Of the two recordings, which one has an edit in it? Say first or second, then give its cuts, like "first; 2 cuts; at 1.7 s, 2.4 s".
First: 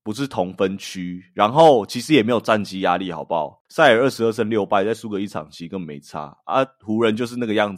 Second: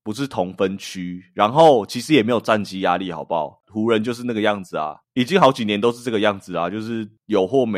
second; 1 cut; at 3.6 s